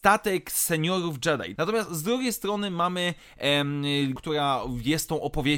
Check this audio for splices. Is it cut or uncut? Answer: cut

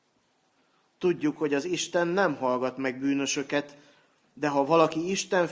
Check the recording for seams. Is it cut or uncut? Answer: uncut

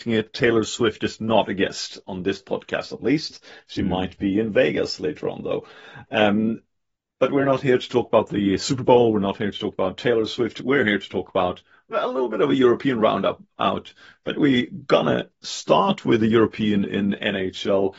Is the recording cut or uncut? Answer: uncut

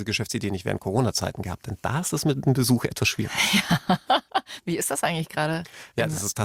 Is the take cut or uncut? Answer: uncut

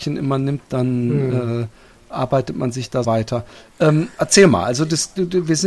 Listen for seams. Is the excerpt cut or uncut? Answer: cut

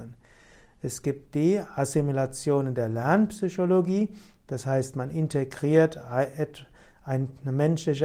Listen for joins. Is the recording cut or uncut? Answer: uncut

